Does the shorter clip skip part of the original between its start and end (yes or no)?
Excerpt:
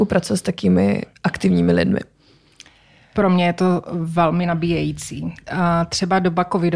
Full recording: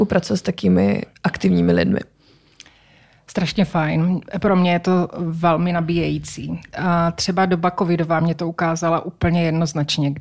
yes